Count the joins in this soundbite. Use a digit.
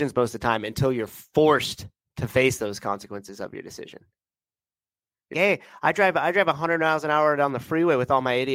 1